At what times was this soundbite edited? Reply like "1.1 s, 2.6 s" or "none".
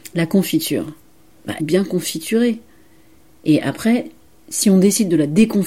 1.6 s